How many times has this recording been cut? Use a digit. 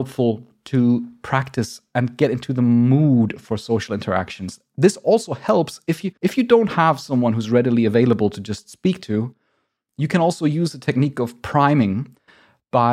1